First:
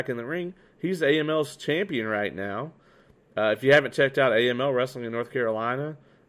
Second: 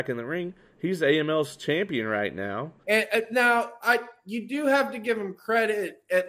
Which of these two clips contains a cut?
second; 1 cut; at 2.8 s

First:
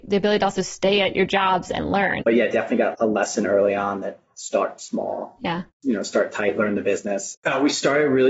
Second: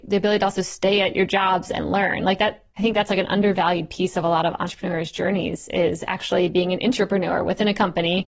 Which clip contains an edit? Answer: first; 2 cuts; at 2.2 s, 7.3 s

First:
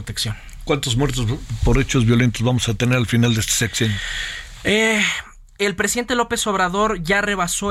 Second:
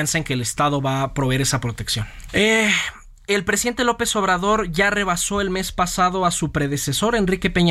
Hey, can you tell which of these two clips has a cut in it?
second; 1 cut; at 2.3 s

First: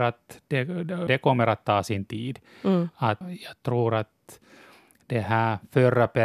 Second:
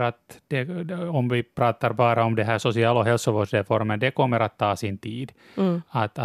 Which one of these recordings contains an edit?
first; 2 cuts; at 1.1 s, 3.2 s

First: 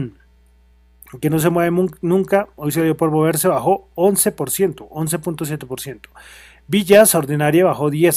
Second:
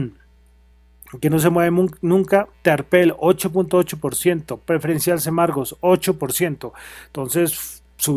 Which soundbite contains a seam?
second; 1 cut; at 2.5 s

